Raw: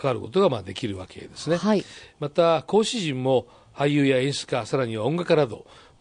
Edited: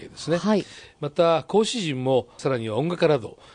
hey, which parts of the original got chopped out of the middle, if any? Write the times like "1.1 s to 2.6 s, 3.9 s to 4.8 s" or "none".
3.6 s to 4.7 s